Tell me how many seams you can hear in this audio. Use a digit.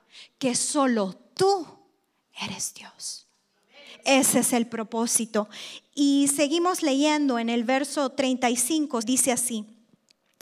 1